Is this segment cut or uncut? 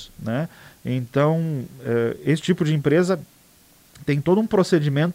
uncut